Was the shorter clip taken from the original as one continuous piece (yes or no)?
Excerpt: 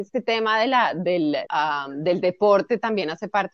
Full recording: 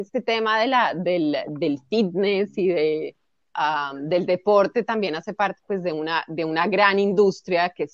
no